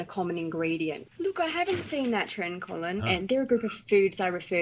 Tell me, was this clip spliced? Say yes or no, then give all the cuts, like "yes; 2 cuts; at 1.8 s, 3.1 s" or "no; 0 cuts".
yes; 2 cuts; at 1.0 s, 3.0 s